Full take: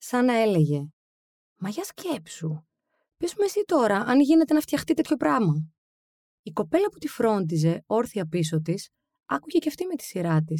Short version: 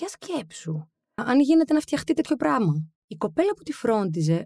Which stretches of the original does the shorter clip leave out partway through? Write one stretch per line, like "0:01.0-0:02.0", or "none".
0:02.9-0:04.0
0:05.8-0:06.3